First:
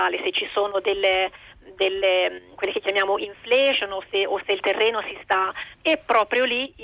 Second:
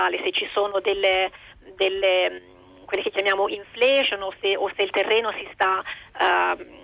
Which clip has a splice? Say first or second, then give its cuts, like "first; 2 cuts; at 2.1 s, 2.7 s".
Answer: first; 2 cuts; at 2.5 s, 5.7 s